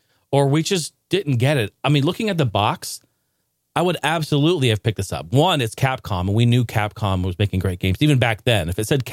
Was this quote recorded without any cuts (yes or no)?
no